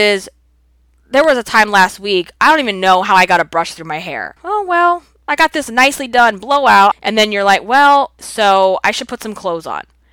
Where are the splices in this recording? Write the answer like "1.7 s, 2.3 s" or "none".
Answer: 4.4 s, 6.9 s, 8.2 s